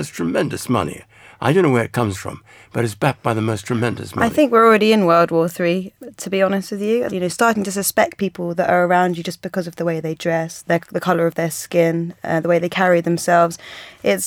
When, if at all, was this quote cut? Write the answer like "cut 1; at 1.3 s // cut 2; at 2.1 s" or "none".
cut 1; at 7.1 s // cut 2; at 10.6 s